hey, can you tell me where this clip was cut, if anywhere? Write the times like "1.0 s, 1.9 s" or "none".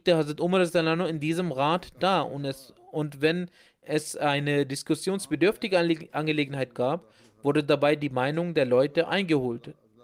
none